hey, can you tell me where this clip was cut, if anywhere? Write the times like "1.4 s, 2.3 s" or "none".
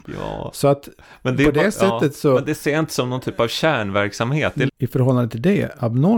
4.7 s